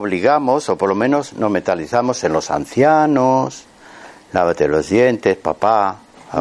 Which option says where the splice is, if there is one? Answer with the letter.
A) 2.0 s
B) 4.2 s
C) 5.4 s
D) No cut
D